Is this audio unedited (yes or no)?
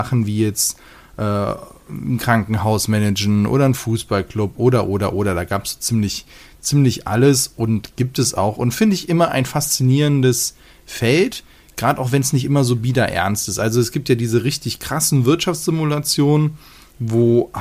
yes